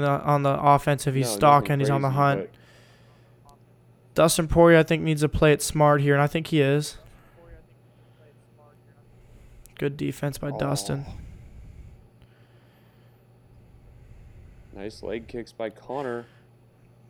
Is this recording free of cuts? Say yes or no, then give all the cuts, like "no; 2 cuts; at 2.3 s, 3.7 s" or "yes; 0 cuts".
yes; 0 cuts